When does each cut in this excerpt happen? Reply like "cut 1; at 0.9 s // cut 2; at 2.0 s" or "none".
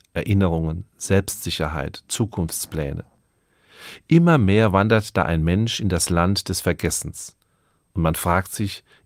none